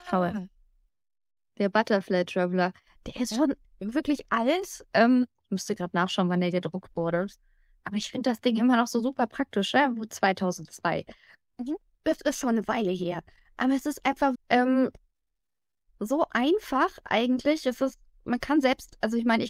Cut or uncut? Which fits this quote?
cut